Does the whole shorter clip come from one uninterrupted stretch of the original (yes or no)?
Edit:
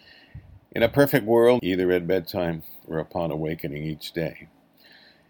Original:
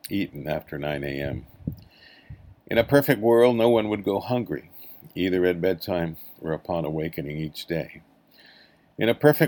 no